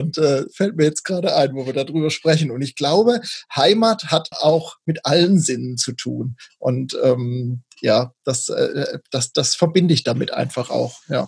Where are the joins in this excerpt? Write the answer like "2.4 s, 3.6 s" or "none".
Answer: 4.3 s